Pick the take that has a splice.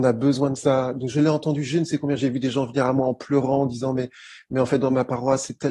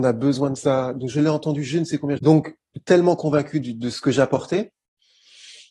second; 1 cut; at 2.2 s

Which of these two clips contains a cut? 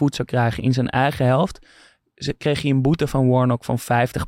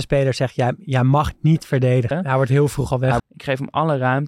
second; 2 cuts; at 2.1 s, 3.2 s

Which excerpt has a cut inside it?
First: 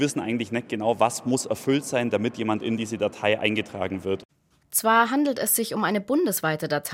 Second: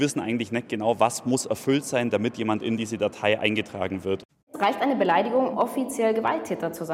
second; 2 cuts; at 4.3 s, 5.5 s

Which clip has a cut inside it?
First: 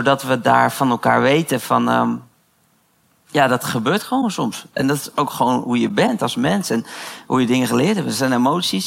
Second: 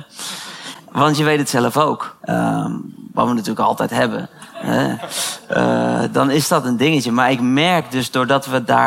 second; 1 cut; at 2.2 s

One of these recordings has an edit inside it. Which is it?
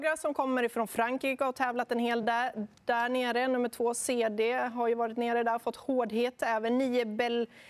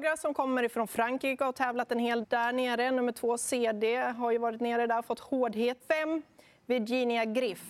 second; 2 cuts; at 2.2 s, 5.8 s

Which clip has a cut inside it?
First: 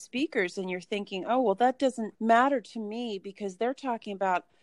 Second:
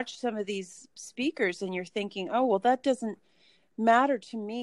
first; 1 cut; at 2.2 s

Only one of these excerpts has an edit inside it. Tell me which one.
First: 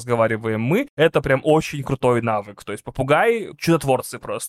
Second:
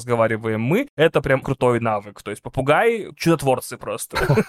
second; 1 cut; at 1.4 s

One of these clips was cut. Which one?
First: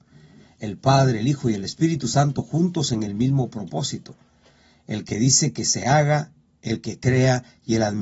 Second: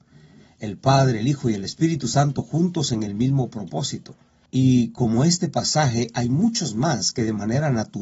second; 1 cut; at 4.5 s

